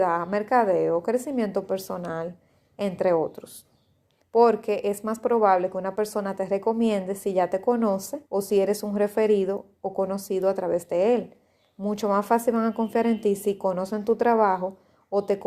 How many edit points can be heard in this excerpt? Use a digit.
2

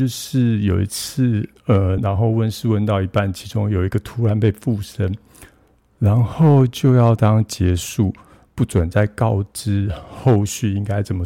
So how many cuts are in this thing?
2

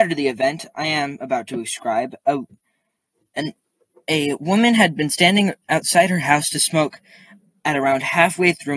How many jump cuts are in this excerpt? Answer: 0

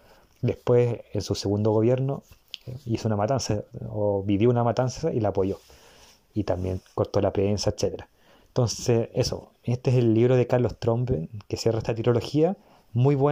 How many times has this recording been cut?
0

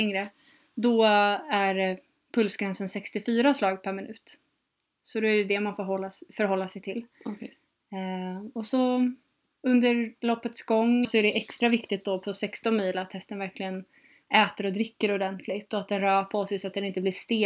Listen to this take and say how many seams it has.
2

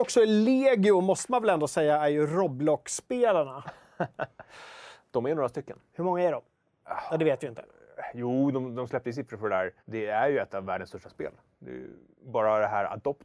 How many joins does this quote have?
1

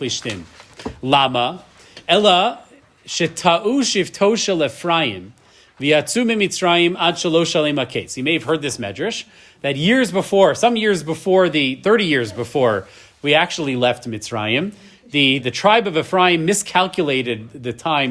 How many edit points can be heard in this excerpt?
1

